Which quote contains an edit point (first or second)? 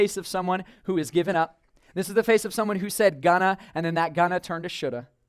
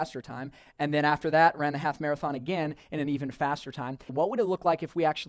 second